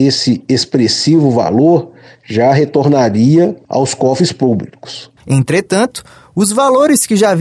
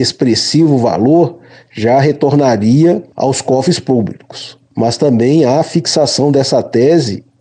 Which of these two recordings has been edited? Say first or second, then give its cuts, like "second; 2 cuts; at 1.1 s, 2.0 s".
first; 1 cut; at 5.2 s